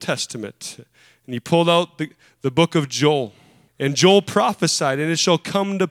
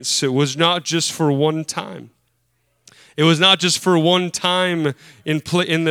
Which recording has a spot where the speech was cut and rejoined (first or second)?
first